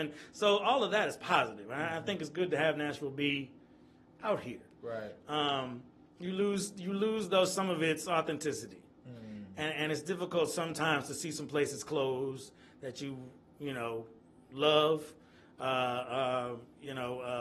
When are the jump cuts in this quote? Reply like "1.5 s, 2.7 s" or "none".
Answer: none

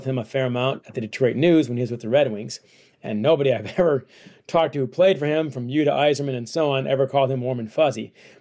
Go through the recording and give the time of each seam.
none

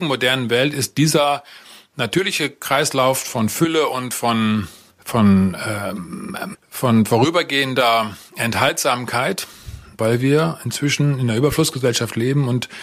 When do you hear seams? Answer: 4.9 s, 6.5 s, 10.0 s

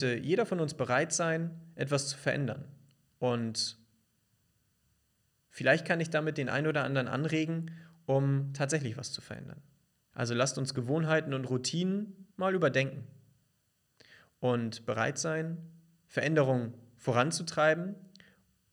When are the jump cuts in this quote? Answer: 10.1 s, 12.3 s

